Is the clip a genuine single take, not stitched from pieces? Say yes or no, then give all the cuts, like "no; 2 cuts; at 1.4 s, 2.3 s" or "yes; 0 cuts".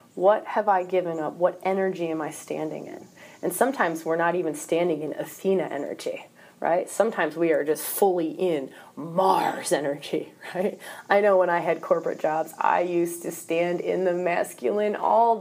yes; 0 cuts